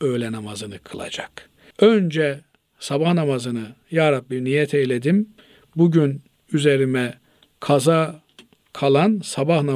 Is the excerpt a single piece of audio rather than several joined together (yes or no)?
no